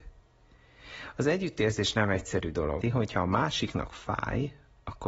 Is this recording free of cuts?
no; 1 cut; at 2.8 s

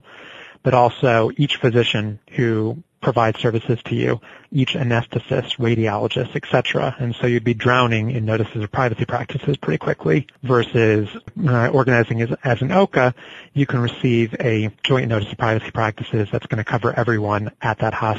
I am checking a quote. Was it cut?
no; 0 cuts

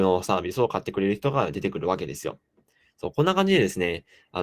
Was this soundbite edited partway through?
no; 0 cuts

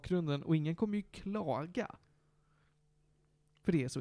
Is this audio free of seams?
yes; 0 cuts

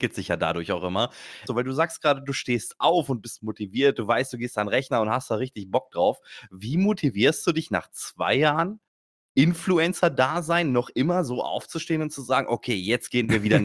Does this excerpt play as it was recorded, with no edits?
no; 1 cut; at 1.5 s

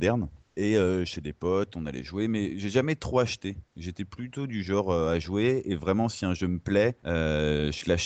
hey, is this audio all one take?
yes; 0 cuts

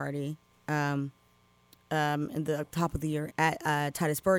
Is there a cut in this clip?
yes; 1 cut; at 3.3 s

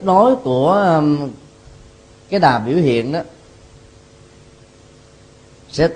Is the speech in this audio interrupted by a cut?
no; 0 cuts

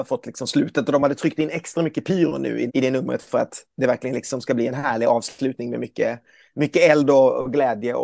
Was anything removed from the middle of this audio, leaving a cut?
yes; 1 cut; at 2.7 s

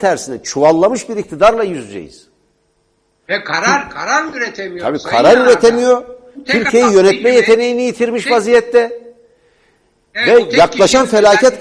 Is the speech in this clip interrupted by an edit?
no; 0 cuts

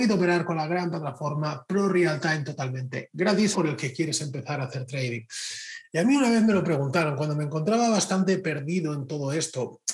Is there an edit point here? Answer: yes; 1 cut; at 3.5 s

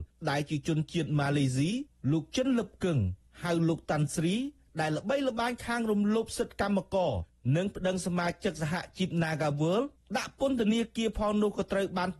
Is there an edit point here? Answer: no; 0 cuts

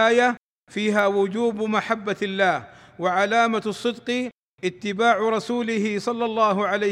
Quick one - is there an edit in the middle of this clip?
no; 0 cuts

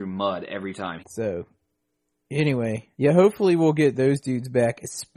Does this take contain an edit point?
yes; 2 cuts; at 1.0 s, 2.9 s

